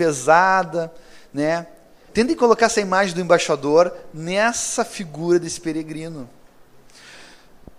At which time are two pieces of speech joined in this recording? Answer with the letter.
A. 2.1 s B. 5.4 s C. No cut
A